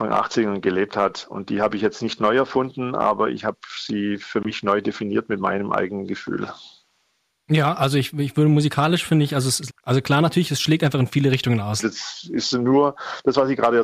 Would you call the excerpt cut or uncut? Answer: cut